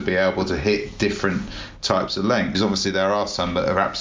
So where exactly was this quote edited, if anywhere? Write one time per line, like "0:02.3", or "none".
0:02.6